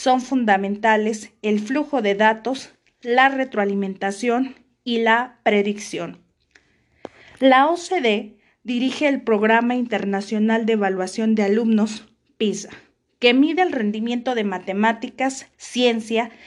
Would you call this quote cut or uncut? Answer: cut